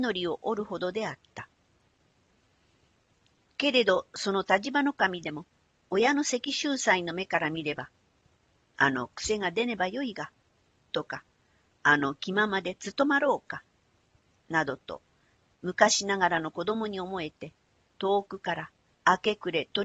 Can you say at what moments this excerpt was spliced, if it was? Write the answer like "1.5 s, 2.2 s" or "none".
none